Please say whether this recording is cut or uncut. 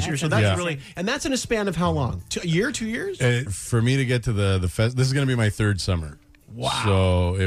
cut